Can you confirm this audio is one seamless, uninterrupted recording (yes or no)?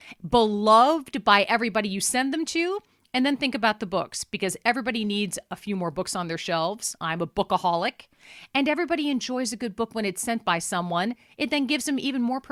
yes